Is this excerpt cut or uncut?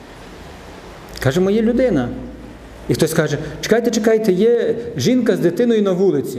uncut